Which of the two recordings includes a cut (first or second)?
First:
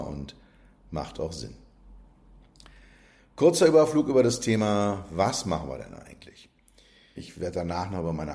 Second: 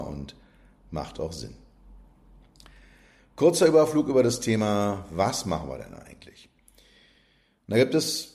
first